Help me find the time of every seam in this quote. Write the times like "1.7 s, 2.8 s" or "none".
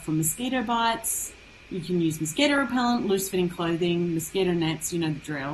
none

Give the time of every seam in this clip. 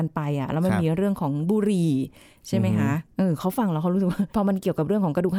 4.3 s

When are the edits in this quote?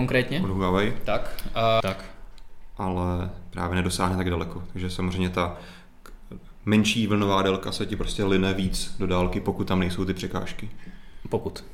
1.8 s

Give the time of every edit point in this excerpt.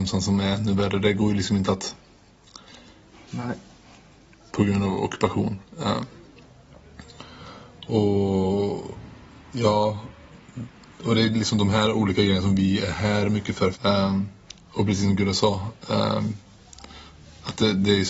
3.3 s, 13.7 s

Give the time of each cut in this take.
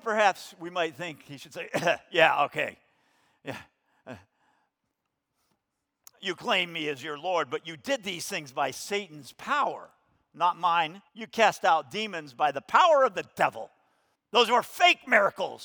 11.1 s, 14.1 s

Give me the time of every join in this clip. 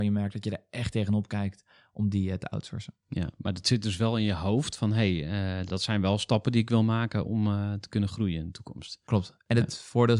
none

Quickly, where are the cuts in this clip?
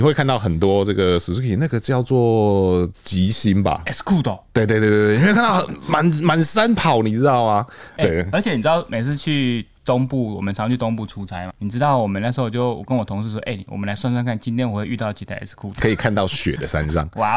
11.5 s, 15.7 s

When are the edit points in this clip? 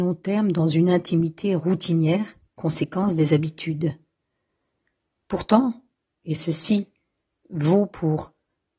5.2 s

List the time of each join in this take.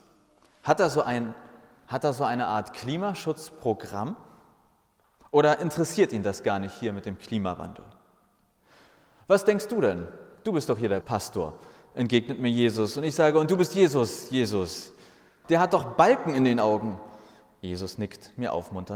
11.0 s, 15.4 s

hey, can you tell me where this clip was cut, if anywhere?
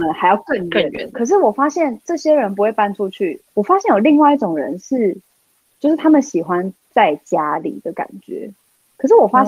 3.5 s, 5.6 s

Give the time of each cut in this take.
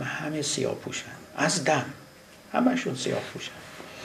none

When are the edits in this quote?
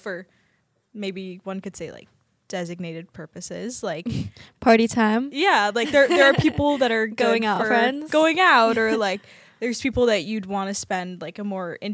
none

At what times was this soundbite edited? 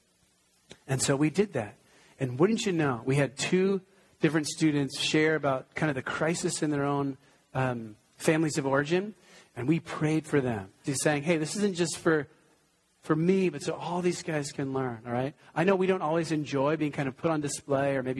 10.9 s

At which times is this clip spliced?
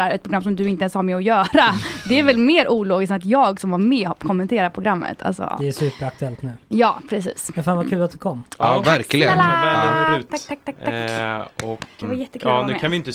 10.3 s, 12.0 s

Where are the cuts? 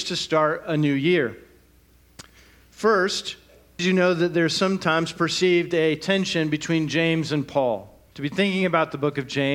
3.8 s, 8.1 s

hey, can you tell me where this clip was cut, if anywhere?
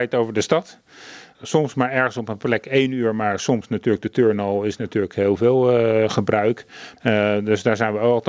7.0 s

